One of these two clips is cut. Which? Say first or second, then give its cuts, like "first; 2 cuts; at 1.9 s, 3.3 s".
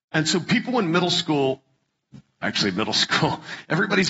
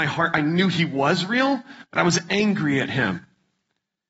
first; 1 cut; at 2.4 s